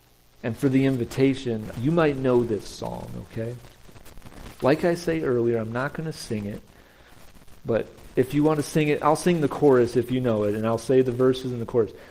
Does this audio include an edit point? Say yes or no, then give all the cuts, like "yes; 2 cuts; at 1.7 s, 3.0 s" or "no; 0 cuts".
yes; 1 cut; at 1.7 s